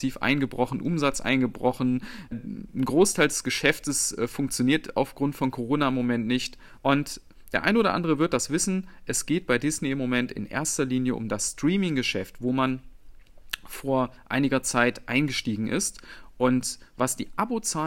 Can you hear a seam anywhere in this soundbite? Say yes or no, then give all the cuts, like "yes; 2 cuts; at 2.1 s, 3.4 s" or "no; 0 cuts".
yes; 2 cuts; at 2.3 s, 6.8 s